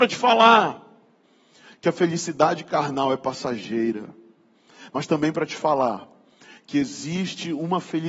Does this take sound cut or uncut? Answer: uncut